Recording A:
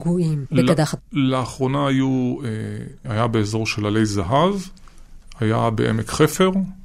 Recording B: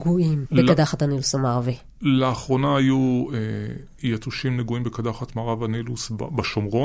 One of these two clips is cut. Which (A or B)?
A